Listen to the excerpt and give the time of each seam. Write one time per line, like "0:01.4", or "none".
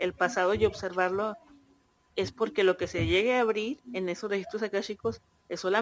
none